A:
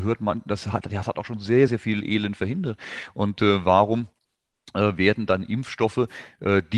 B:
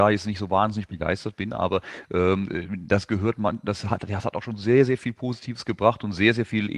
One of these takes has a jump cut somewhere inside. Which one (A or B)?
A